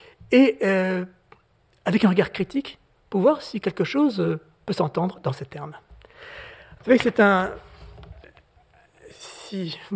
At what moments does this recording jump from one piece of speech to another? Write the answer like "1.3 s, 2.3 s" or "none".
6.8 s

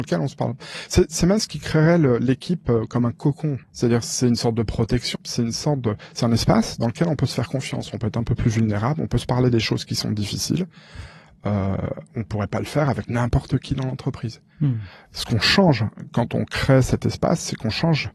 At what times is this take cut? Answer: 3.6 s, 5.2 s

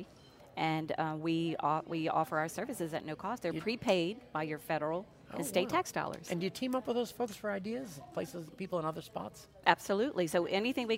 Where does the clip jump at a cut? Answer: none

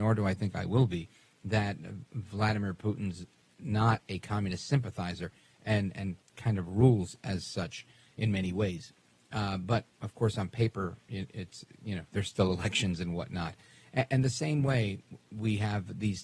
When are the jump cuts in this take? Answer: none

